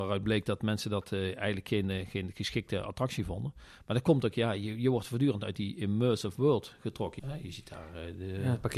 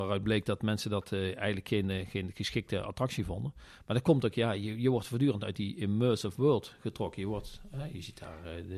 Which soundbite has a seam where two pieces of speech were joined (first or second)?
first